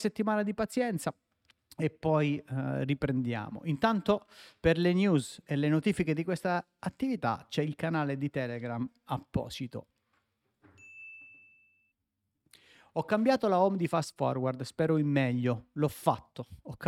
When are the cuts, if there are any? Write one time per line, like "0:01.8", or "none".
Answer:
none